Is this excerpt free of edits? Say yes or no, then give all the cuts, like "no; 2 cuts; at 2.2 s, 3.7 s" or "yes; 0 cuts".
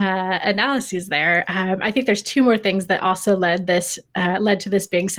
yes; 0 cuts